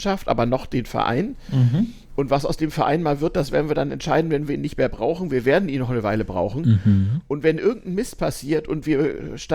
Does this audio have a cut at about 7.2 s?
no; 0 cuts

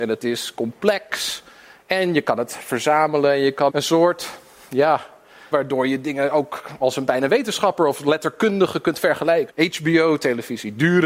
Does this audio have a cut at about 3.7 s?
yes; 3 cuts; at 3.7 s, 5.5 s, 9.5 s

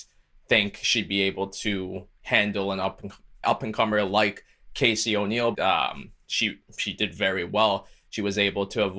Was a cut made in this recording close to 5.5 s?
yes; 1 cut; at 5.5 s

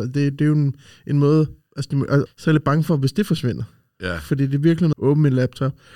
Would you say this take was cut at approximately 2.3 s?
yes; 2 cuts; at 2.3 s, 4.9 s

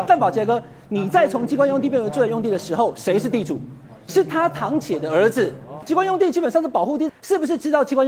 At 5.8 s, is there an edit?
yes; 2 cuts; at 5.8 s, 7.1 s

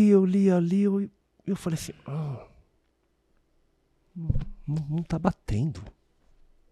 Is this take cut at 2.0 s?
no; 0 cuts

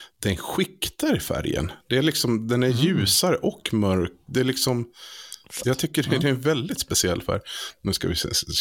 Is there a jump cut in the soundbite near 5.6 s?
yes; 1 cut; at 5.6 s

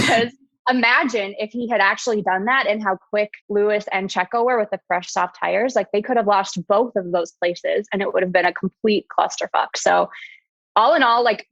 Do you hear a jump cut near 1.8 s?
no; 1 cut; at 3.4 s

